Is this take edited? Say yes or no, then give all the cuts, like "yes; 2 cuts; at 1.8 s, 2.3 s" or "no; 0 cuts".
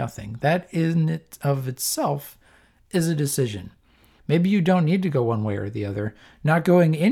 yes; 1 cut; at 4.2 s